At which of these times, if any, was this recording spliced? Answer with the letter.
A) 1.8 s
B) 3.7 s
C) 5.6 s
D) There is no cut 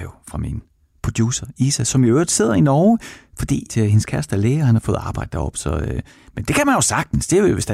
B